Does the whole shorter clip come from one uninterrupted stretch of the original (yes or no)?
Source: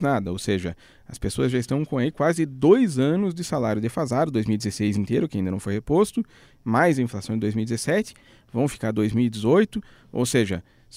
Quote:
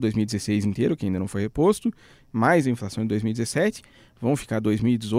yes